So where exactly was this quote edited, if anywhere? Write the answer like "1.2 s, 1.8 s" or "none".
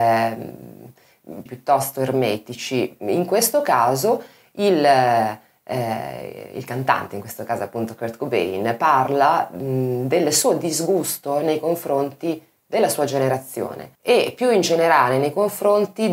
1.5 s, 14.0 s